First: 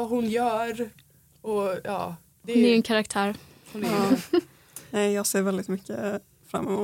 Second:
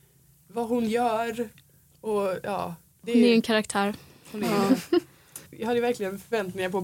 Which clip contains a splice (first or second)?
second